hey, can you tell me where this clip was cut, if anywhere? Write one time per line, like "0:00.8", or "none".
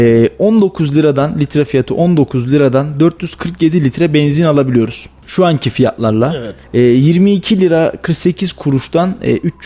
0:05.2
0:06.6